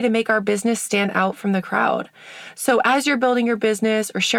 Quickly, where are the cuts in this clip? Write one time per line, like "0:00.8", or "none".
none